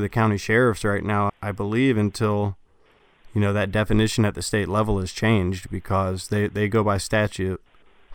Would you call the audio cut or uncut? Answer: cut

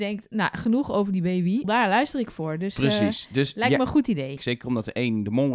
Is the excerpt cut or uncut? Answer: cut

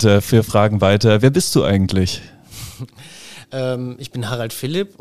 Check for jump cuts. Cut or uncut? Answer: uncut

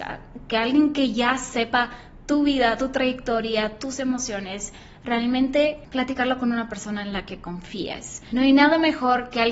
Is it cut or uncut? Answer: uncut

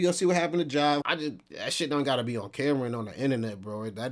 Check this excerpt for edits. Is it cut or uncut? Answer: cut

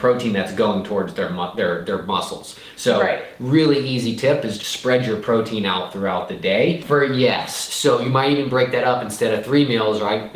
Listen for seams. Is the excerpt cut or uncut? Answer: cut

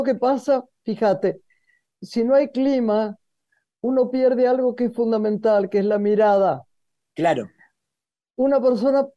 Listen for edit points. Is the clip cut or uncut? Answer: uncut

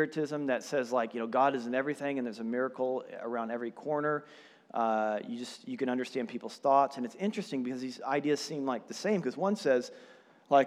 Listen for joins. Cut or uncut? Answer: uncut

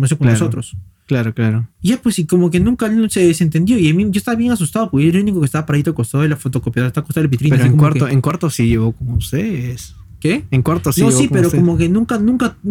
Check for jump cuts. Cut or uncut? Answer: cut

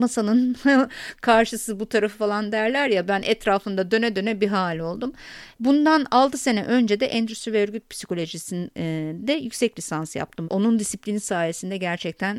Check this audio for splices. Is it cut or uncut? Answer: cut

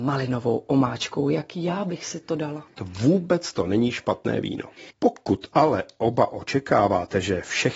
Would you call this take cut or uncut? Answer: cut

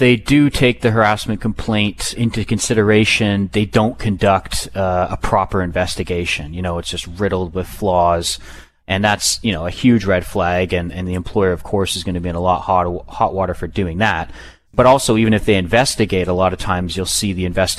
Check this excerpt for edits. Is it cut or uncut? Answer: cut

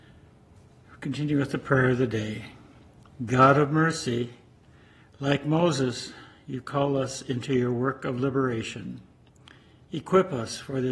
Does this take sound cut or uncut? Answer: uncut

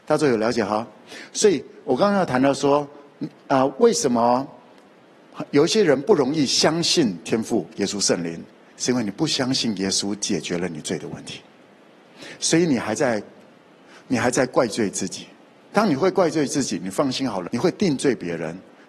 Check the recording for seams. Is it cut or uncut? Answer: cut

